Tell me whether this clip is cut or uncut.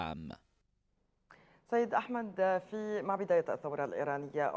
uncut